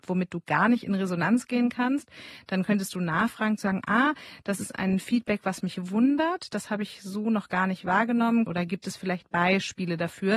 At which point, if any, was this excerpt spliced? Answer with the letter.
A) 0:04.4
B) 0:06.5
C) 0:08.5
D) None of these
C